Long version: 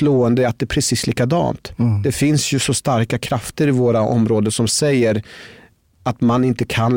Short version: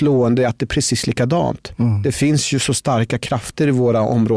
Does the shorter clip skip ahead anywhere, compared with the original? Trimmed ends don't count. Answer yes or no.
no